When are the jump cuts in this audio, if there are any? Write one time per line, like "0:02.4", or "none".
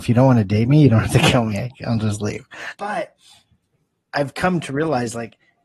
0:02.7